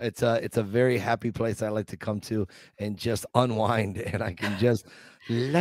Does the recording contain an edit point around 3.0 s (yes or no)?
no